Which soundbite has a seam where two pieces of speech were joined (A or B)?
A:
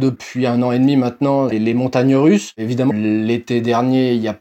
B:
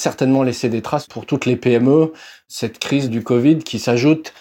A